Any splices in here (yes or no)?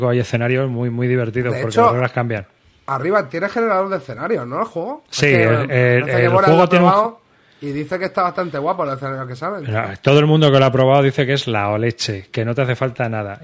no